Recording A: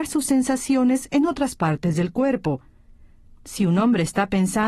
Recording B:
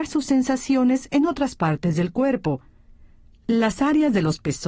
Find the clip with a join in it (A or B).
A